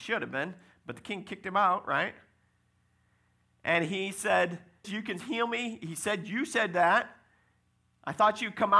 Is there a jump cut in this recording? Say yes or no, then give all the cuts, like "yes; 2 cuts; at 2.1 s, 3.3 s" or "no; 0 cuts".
yes; 1 cut; at 4.8 s